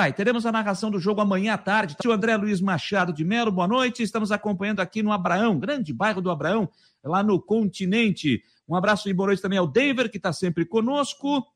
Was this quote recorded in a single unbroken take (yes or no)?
no